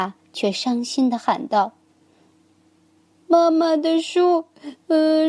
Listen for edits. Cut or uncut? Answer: uncut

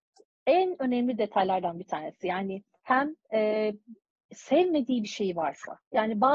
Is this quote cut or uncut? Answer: uncut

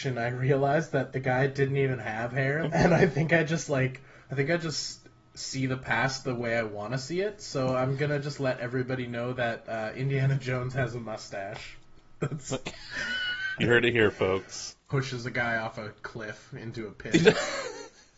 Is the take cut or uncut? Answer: cut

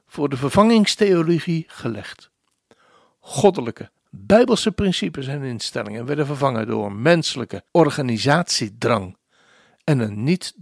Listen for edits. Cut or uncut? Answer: cut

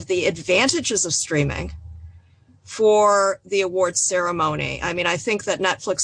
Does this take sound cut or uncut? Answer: uncut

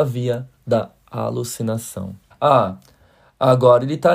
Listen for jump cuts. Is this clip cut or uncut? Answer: cut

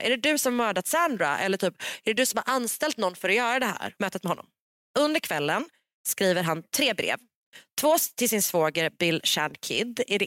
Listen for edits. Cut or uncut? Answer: cut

